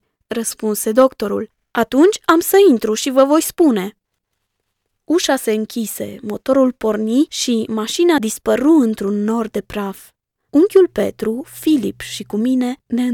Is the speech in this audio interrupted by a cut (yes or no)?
no